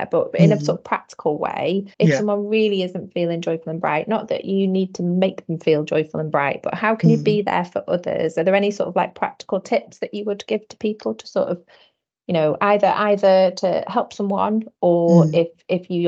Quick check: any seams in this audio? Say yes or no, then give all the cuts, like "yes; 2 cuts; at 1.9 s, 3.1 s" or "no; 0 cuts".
yes; 1 cut; at 1.9 s